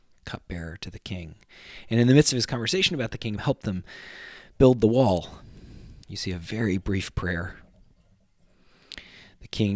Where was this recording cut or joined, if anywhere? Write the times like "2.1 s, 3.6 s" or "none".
3.4 s, 6.0 s